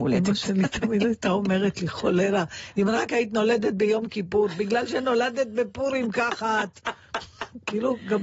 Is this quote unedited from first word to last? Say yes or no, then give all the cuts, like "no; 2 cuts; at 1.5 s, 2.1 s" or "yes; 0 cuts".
yes; 0 cuts